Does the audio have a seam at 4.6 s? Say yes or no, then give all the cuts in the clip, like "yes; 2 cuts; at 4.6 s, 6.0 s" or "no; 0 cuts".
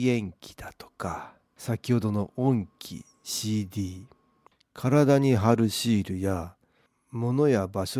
no; 1 cut; at 1.6 s